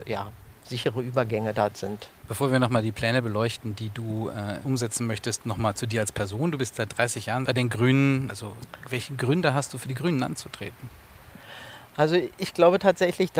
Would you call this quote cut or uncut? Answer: cut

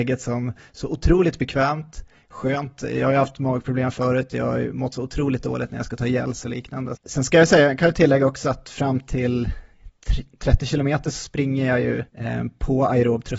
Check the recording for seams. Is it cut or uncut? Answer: cut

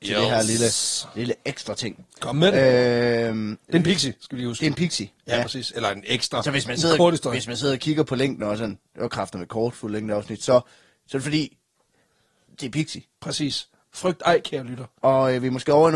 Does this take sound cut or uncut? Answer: uncut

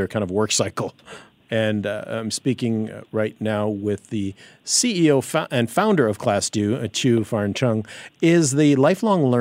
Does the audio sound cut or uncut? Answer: cut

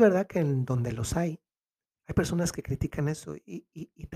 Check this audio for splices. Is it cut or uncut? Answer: uncut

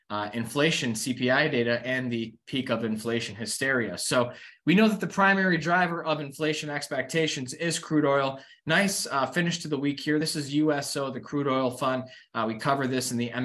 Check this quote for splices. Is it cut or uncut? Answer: uncut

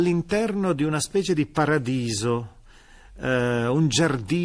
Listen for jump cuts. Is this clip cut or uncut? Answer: uncut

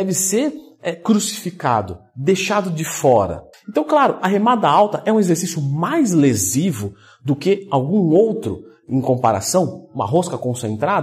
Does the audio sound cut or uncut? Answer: cut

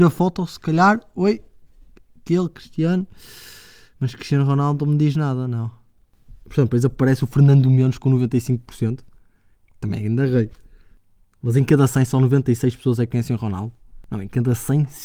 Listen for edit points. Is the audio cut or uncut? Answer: uncut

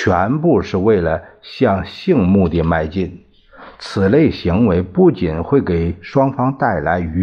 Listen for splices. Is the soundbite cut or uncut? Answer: uncut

